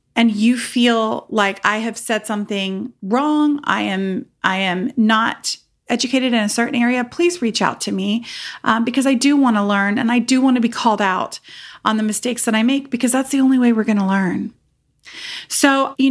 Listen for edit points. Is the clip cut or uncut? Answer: uncut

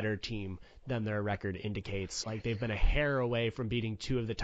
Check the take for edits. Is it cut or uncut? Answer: cut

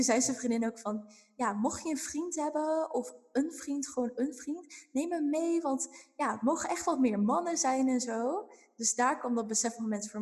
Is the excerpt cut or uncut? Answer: uncut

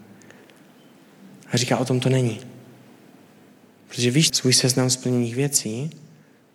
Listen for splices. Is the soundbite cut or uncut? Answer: cut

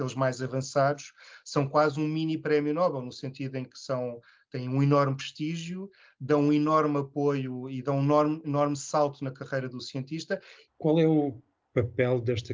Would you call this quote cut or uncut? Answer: cut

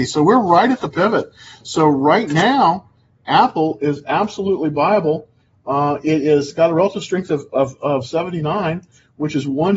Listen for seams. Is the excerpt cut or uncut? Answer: uncut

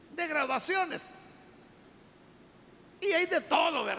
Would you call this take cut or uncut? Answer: uncut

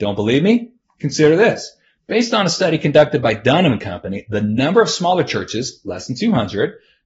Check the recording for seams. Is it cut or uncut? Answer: uncut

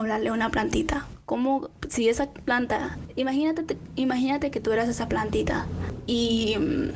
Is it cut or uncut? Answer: uncut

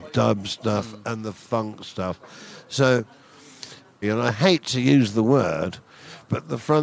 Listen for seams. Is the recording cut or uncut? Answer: cut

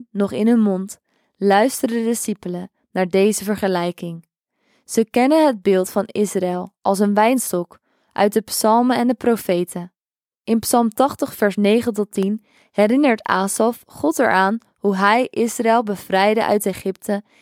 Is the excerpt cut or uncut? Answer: uncut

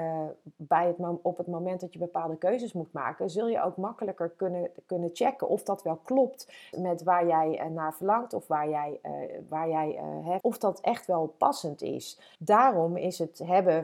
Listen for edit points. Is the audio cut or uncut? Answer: cut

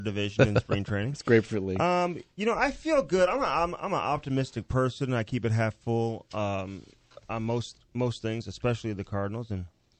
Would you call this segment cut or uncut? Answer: uncut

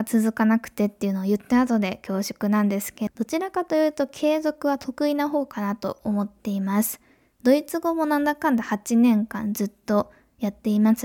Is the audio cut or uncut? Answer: cut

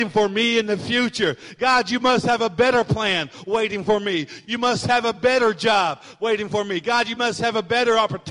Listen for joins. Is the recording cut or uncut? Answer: uncut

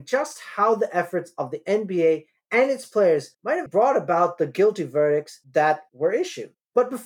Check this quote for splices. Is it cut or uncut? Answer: cut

